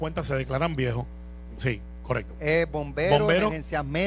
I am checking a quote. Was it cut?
yes; 1 cut; at 1.6 s

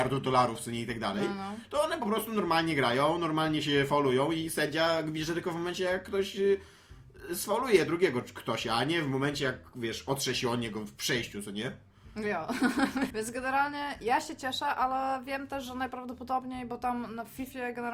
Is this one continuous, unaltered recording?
no; 1 cut; at 13.1 s

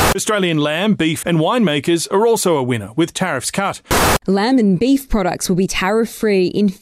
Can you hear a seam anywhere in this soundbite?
yes; 2 cuts; at 1.2 s, 4.2 s

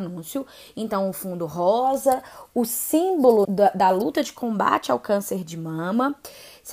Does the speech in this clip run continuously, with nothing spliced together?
no; 1 cut; at 3.4 s

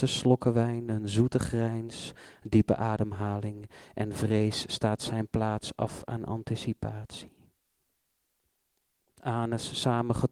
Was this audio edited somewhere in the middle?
yes; 1 cut; at 9.0 s

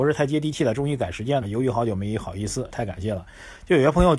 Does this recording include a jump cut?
yes; 2 cuts; at 1.4 s, 2.7 s

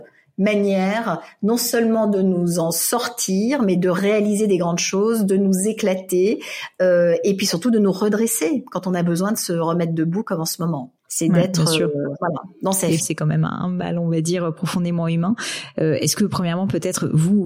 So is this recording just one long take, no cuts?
no; 2 cuts; at 11.0 s, 13.0 s

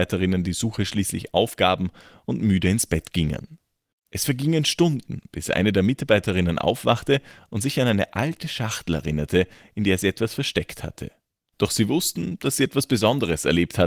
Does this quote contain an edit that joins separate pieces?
yes; 2 cuts; at 3.9 s, 11.5 s

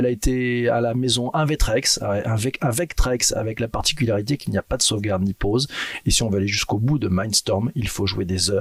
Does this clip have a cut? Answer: no; 0 cuts

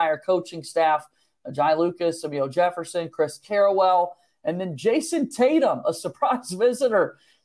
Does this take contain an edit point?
no; 0 cuts

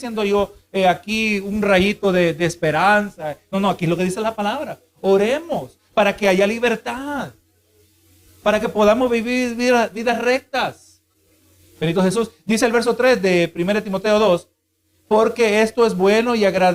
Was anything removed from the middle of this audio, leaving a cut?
no; 0 cuts

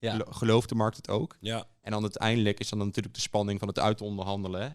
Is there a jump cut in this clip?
no; 0 cuts

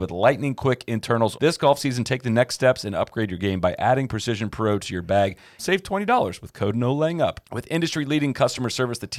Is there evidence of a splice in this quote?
yes; 3 cuts; at 1.3 s, 5.6 s, 7.4 s

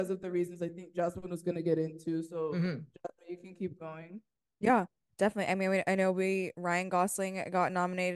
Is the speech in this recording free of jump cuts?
yes; 0 cuts

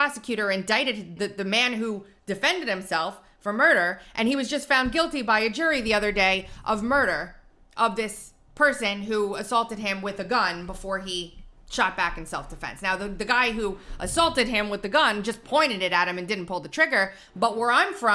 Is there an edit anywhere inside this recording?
yes; 2 cuts; at 1.2 s, 11.6 s

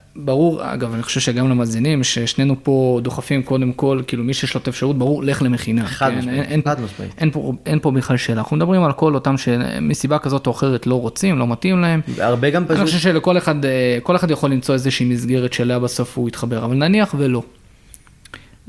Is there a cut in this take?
yes; 1 cut; at 6.7 s

